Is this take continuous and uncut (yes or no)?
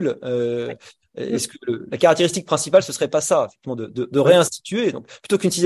no